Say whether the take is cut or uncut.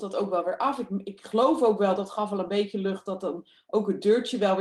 uncut